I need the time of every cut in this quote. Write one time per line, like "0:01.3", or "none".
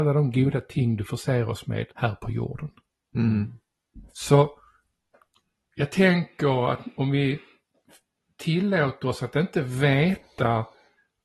0:01.9
0:04.1